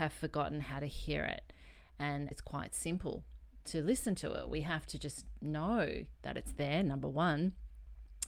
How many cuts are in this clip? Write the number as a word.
one